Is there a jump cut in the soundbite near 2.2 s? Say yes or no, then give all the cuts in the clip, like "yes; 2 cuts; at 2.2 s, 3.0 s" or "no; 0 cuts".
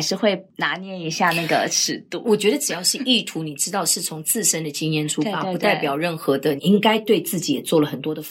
no; 1 cut; at 6.6 s